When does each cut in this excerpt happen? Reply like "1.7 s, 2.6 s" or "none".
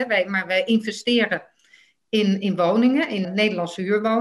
3.2 s